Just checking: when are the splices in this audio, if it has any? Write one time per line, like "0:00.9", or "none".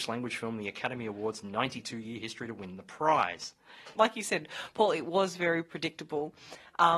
0:04.0